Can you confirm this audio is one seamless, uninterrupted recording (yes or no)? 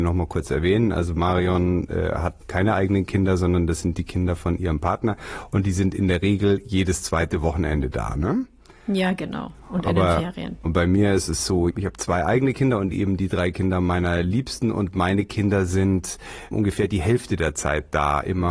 no